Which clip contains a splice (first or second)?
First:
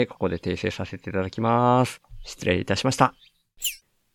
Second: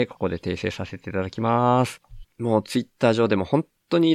second